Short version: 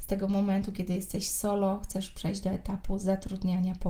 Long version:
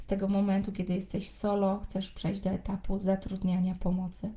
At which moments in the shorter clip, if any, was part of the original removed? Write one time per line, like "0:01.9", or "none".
none